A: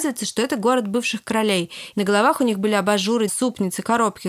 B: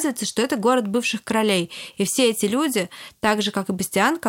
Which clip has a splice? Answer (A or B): A